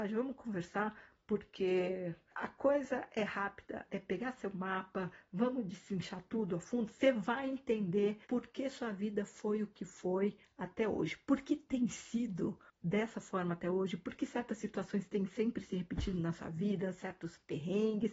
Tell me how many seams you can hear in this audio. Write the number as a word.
two